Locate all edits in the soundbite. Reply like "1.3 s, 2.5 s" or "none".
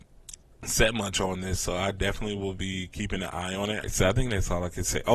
3.8 s

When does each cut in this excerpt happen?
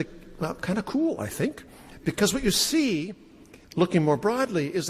3.6 s

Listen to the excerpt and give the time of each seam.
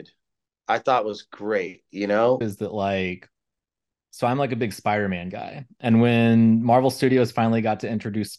2.4 s

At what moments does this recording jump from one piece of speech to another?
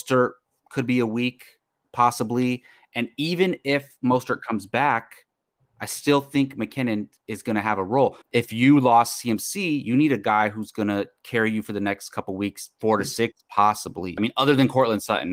8.2 s, 14.2 s

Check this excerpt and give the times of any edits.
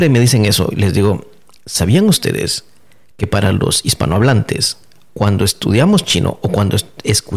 none

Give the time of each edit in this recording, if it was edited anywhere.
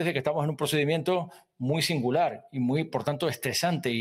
none

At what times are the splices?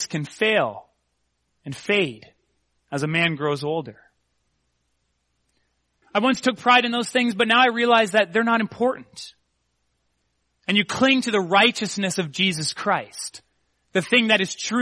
6.0 s

